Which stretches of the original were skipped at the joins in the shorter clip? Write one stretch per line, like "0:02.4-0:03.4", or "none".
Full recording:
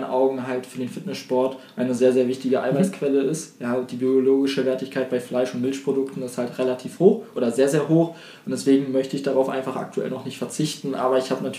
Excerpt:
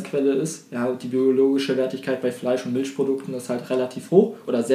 none